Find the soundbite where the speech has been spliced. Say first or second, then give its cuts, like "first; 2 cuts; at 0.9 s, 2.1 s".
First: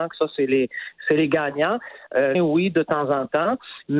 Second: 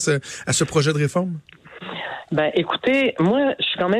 first; 1 cut; at 2.3 s